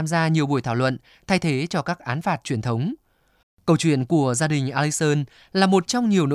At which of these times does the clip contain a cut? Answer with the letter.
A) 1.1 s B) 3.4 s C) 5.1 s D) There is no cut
B